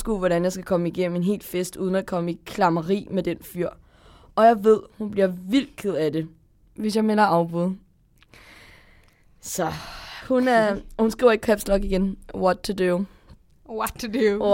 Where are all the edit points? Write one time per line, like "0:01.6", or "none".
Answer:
none